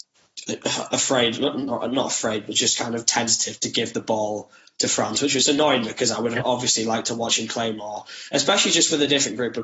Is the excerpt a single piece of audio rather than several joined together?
yes; 0 cuts

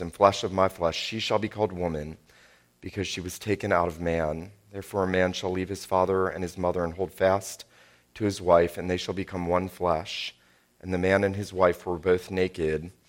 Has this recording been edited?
no; 0 cuts

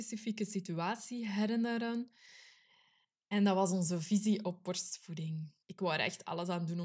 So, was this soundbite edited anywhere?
yes; 1 cut; at 5.6 s

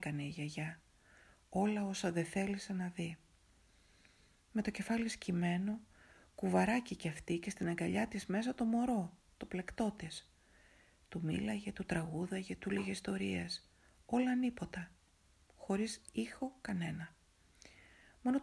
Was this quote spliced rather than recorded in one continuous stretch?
no; 0 cuts

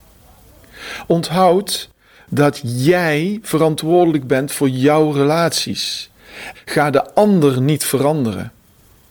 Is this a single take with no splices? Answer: no; 1 cut; at 6.5 s

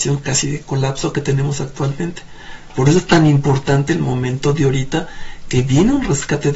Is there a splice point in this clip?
no; 0 cuts

